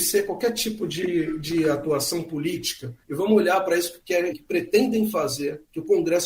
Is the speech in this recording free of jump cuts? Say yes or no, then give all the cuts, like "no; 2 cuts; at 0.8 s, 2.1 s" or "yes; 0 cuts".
no; 2 cuts; at 3.0 s, 4.3 s